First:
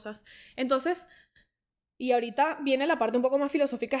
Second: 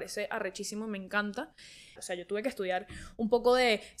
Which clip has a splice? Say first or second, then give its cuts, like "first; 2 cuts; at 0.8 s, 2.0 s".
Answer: second; 1 cut; at 2.0 s